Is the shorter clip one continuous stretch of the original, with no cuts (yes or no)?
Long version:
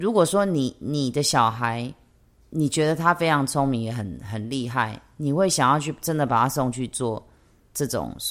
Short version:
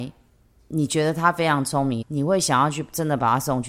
no